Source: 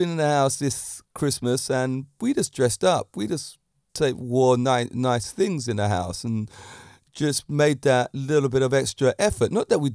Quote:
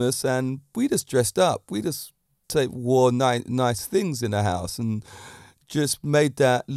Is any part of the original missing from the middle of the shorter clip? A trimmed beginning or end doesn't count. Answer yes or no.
no